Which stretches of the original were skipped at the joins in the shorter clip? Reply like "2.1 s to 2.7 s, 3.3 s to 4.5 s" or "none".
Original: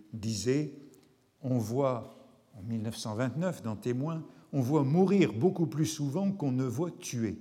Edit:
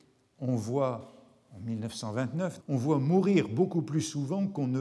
3.6 s to 4.4 s